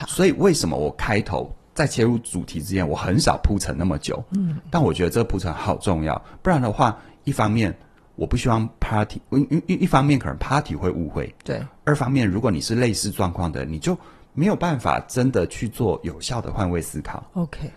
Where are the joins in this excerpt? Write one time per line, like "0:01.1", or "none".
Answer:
none